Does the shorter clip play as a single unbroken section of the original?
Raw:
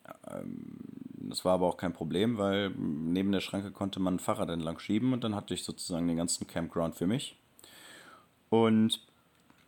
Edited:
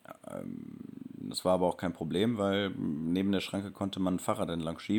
yes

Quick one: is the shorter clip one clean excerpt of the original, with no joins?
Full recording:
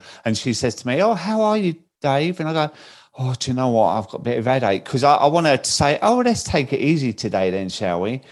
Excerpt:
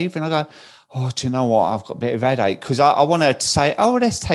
yes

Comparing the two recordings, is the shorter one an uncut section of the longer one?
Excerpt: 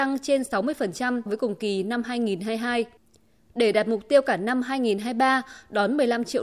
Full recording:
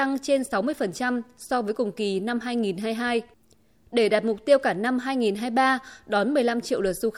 no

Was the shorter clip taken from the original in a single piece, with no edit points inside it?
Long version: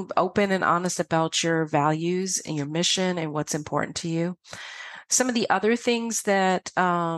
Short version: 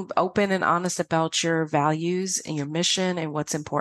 yes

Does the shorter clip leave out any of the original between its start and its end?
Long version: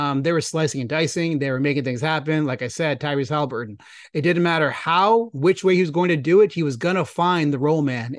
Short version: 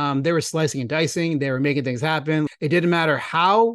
yes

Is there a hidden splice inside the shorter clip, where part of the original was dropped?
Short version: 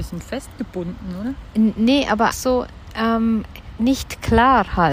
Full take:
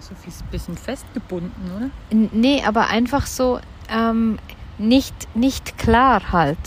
yes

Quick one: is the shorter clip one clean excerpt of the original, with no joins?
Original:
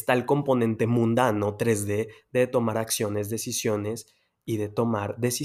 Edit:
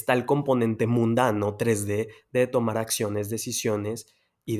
yes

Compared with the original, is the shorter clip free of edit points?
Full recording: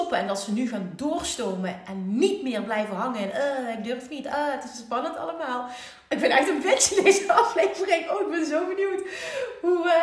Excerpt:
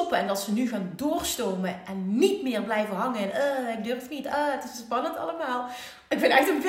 yes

